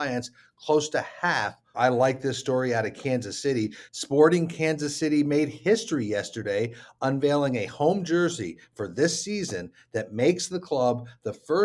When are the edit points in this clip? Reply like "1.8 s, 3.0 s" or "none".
1.7 s